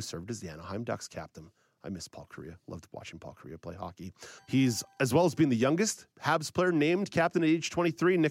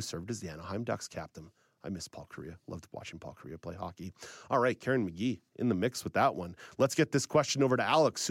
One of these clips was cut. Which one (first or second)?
first